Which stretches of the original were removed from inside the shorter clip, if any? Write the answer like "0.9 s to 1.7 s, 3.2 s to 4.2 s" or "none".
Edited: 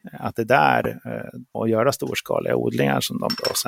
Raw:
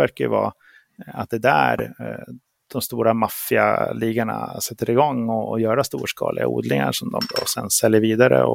2.5 s to 5.5 s